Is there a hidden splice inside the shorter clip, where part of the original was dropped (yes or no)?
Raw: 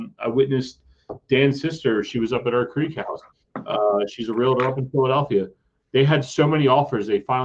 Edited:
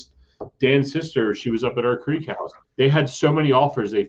yes